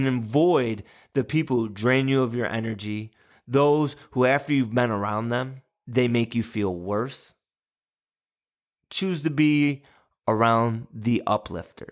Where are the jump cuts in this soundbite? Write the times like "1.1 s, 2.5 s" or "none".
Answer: 3.3 s